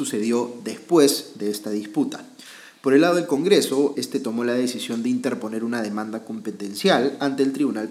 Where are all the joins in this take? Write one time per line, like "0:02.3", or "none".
0:03.9